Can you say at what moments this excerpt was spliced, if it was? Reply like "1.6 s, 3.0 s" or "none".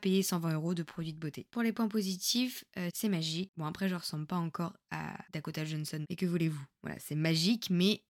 2.9 s